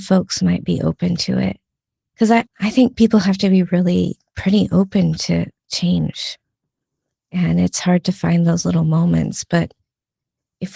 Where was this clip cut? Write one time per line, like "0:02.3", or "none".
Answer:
0:02.5